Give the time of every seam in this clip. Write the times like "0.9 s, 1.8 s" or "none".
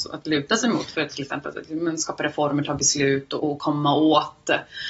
none